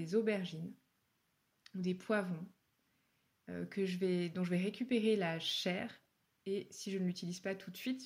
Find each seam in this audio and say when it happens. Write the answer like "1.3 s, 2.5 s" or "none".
none